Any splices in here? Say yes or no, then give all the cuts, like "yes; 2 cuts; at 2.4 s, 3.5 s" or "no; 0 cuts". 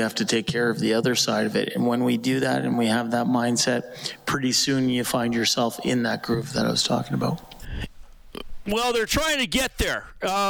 no; 0 cuts